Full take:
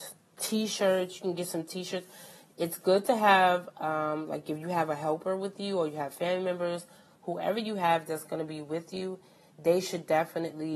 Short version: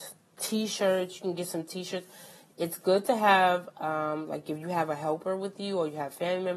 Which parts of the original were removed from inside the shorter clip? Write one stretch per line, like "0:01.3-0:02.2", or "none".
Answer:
none